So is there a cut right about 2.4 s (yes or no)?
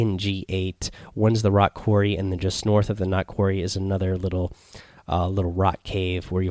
no